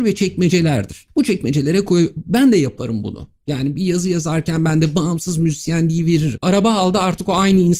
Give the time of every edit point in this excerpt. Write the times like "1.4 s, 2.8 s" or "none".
6.4 s